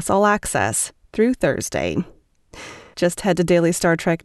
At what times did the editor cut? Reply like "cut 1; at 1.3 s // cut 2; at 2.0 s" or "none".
cut 1; at 2.9 s